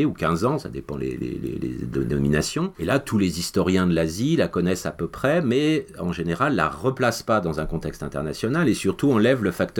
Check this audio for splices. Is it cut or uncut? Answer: cut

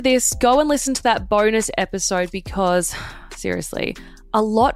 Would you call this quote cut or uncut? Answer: uncut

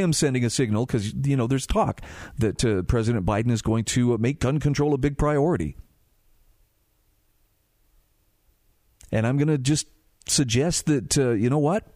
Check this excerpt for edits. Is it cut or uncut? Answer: uncut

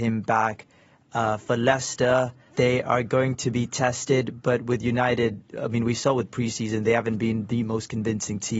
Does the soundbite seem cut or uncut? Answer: uncut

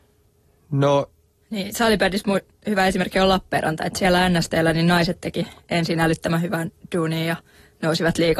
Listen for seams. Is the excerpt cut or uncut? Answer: cut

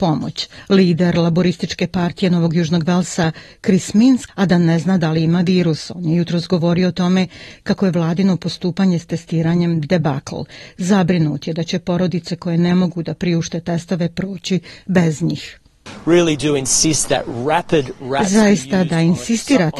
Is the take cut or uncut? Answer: cut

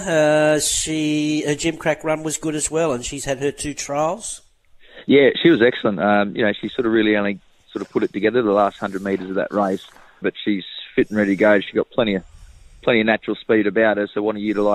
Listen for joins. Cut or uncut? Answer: cut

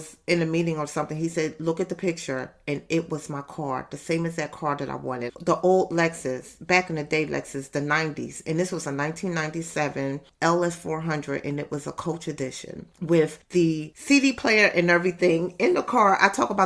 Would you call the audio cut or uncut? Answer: cut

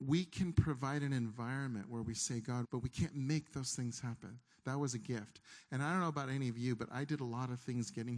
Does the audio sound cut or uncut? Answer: cut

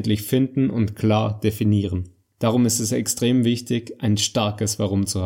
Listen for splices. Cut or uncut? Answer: cut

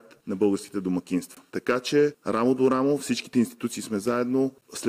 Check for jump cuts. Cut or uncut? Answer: cut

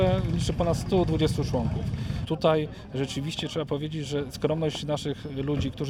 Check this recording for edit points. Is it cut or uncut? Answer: cut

